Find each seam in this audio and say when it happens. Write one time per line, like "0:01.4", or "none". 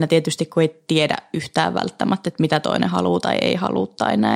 none